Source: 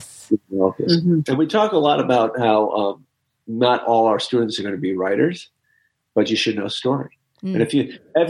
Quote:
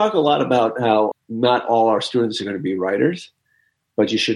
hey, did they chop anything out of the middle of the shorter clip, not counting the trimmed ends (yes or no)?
yes